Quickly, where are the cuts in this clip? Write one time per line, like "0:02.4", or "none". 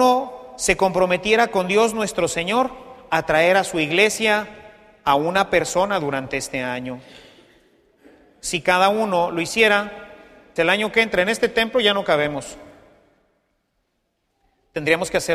0:10.6